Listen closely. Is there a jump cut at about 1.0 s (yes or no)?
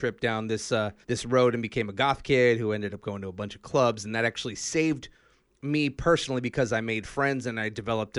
yes